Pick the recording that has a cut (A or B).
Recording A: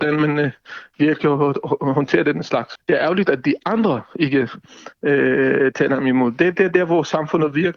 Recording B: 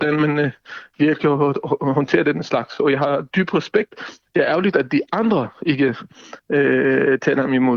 A